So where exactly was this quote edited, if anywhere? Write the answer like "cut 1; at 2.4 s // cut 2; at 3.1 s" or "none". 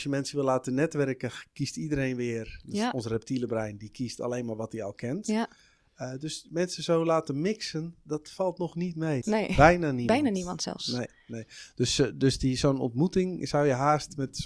cut 1; at 9.2 s